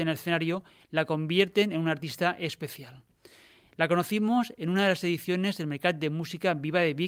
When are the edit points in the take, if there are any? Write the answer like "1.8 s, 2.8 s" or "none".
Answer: none